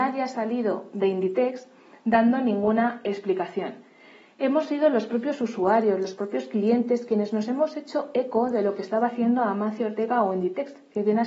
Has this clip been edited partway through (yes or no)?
no